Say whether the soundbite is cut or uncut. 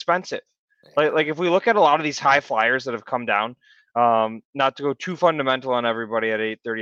uncut